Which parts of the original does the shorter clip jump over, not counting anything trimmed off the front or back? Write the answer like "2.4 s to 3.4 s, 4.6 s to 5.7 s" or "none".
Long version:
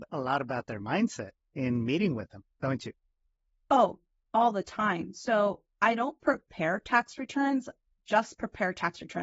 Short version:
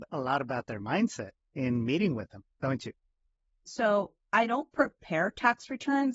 3.6 s to 5.1 s